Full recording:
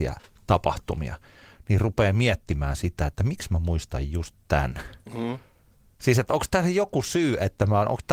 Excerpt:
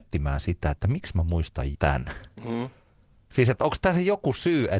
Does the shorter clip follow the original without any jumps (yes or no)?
no